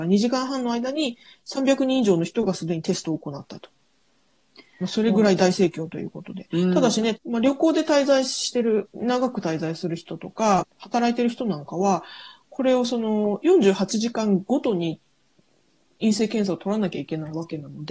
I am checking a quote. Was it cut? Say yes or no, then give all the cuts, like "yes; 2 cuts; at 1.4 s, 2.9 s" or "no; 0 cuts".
yes; 3 cuts; at 7.1 s, 8.8 s, 10.6 s